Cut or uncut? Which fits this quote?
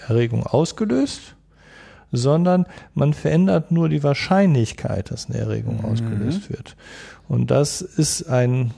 uncut